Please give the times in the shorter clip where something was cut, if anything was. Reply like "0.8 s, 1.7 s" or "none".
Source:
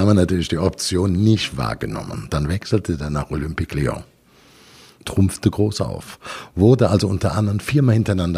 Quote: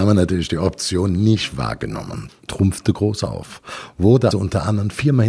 2.3 s, 4.3 s